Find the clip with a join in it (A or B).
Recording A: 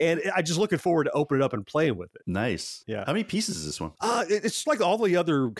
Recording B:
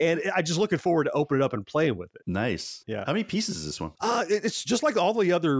A